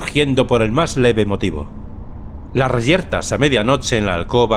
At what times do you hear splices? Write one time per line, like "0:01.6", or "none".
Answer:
none